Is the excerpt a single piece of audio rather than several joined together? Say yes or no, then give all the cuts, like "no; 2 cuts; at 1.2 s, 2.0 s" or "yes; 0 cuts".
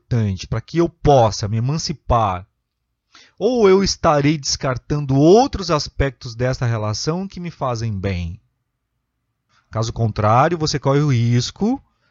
no; 1 cut; at 9.5 s